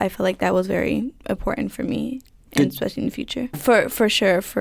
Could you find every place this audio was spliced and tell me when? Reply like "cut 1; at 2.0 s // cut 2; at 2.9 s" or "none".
cut 1; at 3.5 s